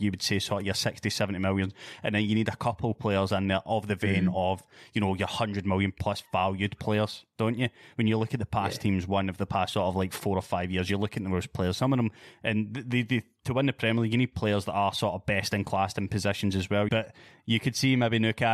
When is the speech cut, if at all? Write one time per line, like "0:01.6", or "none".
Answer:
0:16.9

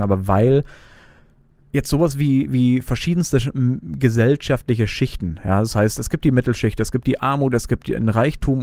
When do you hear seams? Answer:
none

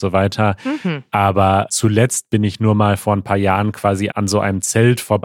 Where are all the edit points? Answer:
0:01.7
0:04.1

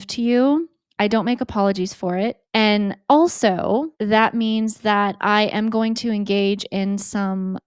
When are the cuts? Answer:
0:02.4
0:03.9

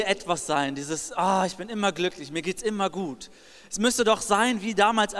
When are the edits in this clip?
none

